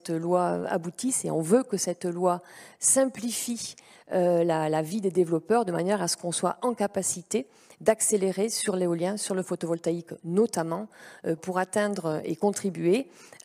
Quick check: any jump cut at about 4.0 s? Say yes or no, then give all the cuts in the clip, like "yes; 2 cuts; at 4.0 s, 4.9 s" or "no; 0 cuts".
no; 1 cut; at 11.4 s